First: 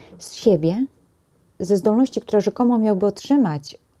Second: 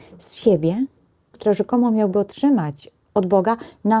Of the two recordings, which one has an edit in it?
second; 1 cut; at 1.3 s

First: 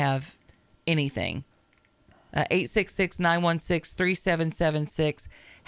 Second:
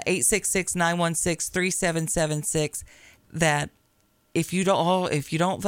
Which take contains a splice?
second; 1 cut; at 3.2 s

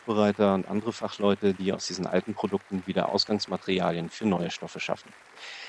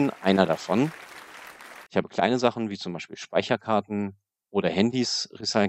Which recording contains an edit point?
second; 1 cut; at 1.9 s

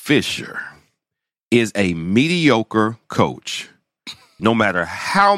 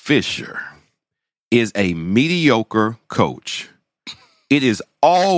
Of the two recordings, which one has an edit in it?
first; 1 cut; at 4.4 s

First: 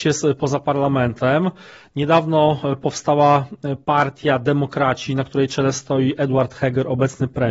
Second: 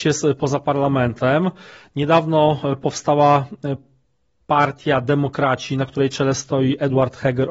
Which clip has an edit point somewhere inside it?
first; 1 cut; at 3.8 s

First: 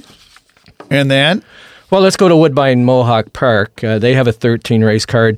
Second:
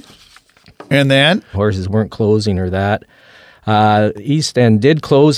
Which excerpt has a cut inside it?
second; 1 cut; at 1.5 s

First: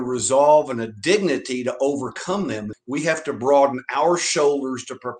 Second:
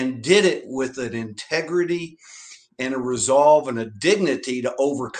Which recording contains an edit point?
first; 1 cut; at 2.7 s

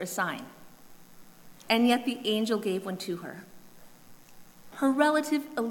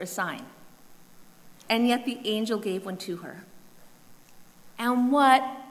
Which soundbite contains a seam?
first; 1 cut; at 4.7 s

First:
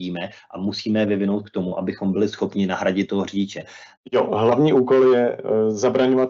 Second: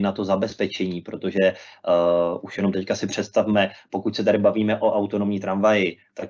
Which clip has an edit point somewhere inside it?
first; 1 cut; at 3.9 s

